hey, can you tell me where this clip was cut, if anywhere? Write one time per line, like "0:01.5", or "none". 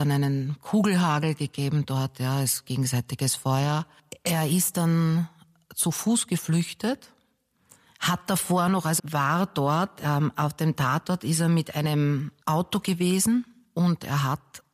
0:09.0
0:12.4